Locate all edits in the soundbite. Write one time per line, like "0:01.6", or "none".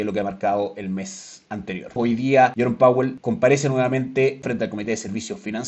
0:02.0
0:04.4